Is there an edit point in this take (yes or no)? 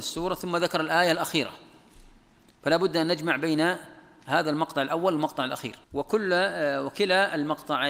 yes